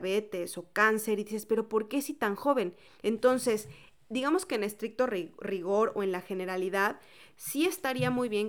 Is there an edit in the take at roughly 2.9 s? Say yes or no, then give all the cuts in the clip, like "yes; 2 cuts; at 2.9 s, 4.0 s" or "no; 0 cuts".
yes; 1 cut; at 2.9 s